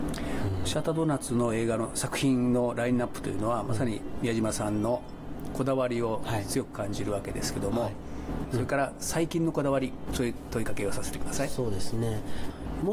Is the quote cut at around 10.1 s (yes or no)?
yes